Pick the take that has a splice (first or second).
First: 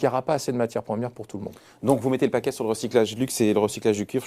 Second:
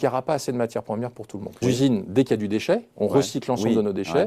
second